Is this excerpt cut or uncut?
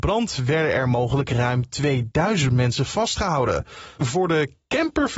cut